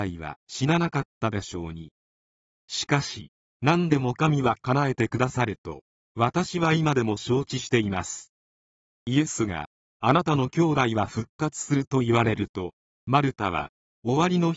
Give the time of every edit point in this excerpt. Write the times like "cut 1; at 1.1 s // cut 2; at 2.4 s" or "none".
cut 1; at 3.4 s